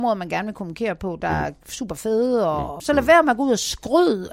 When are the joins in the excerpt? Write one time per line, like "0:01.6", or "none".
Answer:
0:02.8